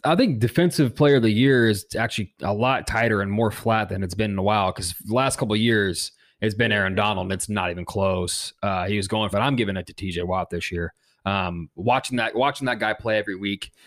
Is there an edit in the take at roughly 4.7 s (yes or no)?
no